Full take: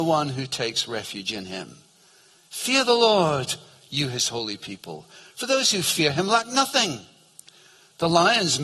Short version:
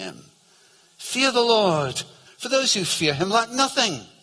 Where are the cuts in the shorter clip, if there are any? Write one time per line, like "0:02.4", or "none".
0:02.3